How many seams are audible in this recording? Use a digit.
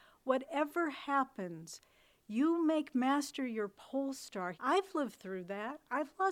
1